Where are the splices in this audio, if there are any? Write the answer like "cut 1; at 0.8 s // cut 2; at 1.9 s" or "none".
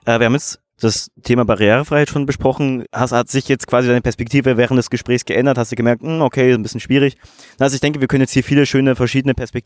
cut 1; at 2.8 s